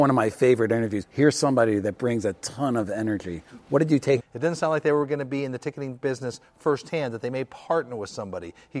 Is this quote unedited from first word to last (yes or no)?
no